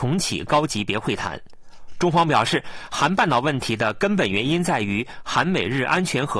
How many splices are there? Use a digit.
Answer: 0